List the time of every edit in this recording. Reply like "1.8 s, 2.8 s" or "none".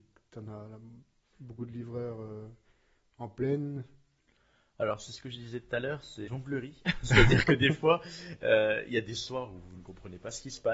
6.3 s

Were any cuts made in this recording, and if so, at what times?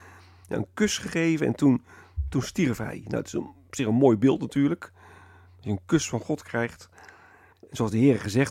7.5 s

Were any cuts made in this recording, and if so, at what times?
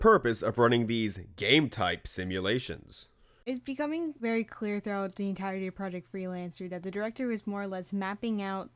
none

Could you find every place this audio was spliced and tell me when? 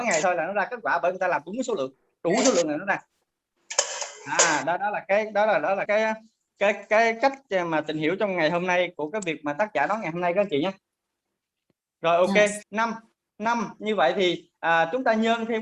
5.9 s, 12.6 s

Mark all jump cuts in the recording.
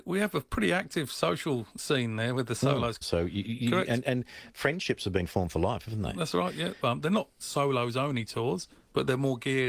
3.0 s, 6.8 s

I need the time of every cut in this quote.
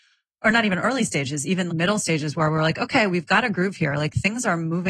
1.7 s

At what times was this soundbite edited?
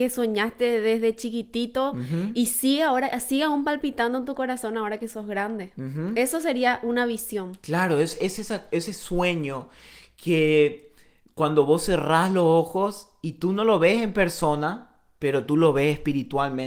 none

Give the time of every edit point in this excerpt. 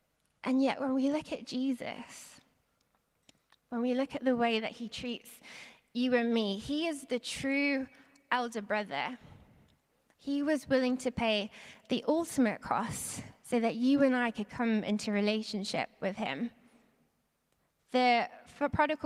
none

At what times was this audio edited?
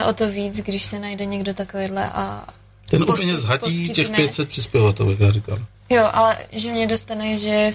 6.5 s

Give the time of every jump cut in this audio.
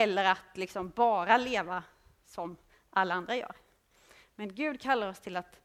none

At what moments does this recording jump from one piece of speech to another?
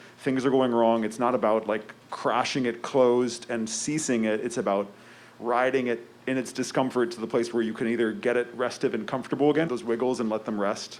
9.7 s

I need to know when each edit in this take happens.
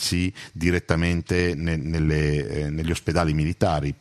none

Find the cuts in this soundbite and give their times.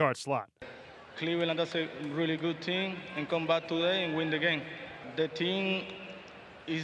1.1 s

